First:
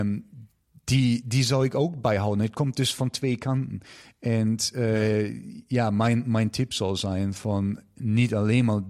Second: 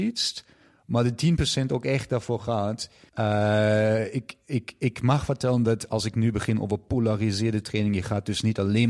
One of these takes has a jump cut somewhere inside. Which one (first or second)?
second